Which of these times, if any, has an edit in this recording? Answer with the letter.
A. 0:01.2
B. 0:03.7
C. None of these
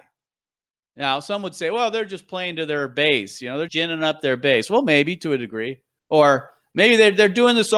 B